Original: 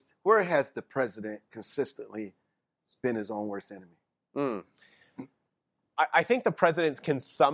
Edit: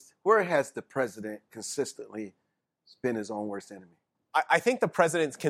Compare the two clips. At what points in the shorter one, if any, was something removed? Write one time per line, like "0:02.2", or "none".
0:04.1